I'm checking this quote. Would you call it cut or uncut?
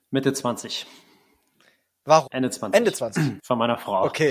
cut